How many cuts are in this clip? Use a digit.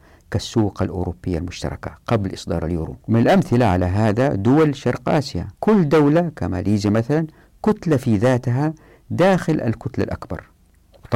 2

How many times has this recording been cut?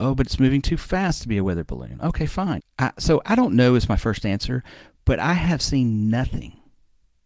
1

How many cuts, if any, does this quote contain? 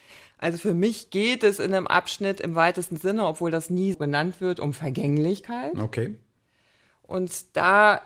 1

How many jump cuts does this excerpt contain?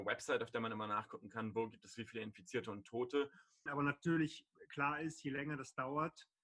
1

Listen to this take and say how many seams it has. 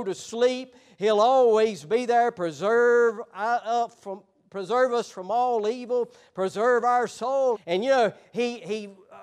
1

